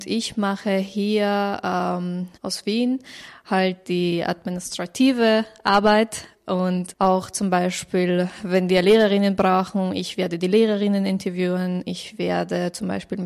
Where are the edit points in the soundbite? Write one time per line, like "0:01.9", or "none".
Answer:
0:02.4